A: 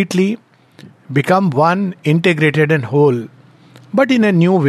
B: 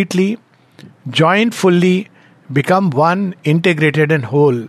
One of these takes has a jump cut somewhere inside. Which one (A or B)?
A